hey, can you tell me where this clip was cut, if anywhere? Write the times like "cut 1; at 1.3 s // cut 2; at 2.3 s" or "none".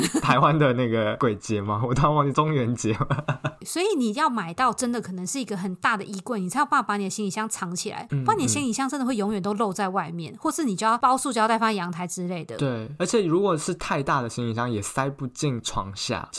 cut 1; at 2.3 s // cut 2; at 3.6 s